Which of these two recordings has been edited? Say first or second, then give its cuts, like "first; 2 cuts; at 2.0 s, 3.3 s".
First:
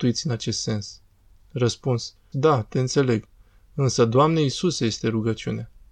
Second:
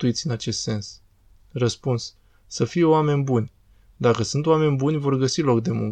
first; 1 cut; at 2.3 s